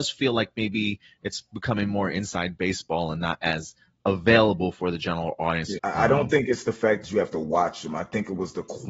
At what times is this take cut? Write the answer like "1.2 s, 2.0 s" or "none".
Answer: 5.8 s